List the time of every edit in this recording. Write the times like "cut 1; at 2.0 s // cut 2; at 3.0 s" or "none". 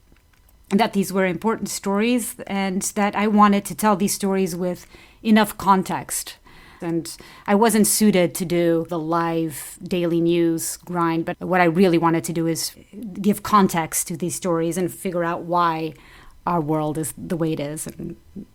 cut 1; at 6.8 s